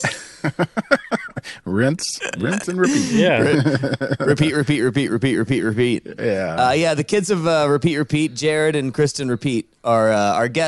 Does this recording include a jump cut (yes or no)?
no